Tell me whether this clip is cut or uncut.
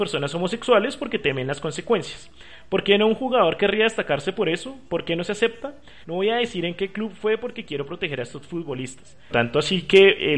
cut